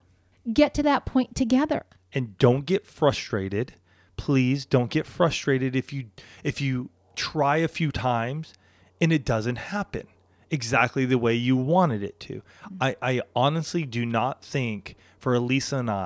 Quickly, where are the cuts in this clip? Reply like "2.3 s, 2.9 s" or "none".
none